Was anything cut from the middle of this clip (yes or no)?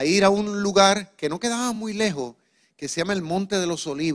no